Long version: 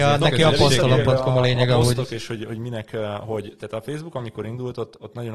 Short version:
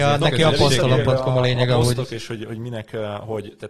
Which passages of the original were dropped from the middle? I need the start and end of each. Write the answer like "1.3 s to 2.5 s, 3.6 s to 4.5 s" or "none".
none